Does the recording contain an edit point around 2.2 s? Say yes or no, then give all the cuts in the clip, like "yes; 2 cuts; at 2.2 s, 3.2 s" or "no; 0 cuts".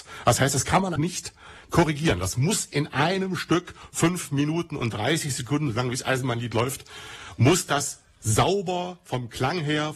no; 1 cut; at 1.0 s